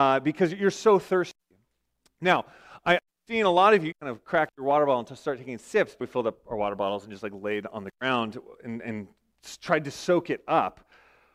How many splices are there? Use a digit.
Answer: 2